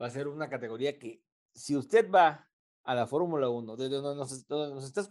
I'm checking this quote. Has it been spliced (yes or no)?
no